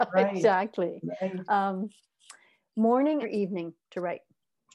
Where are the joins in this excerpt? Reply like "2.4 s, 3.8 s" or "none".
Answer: 3.2 s